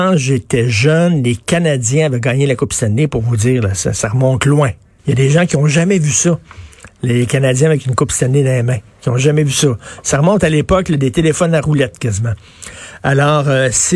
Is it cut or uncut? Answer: cut